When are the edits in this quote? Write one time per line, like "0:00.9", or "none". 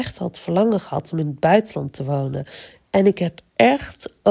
none